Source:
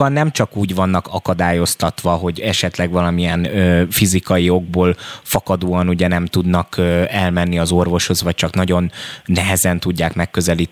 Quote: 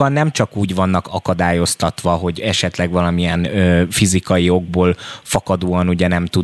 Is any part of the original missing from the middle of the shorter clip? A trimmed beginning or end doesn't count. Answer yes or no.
no